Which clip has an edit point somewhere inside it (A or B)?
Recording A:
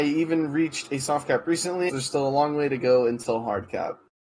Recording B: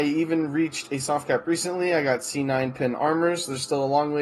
A